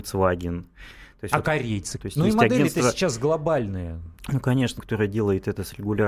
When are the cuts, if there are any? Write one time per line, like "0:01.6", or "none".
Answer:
0:02.0
0:04.8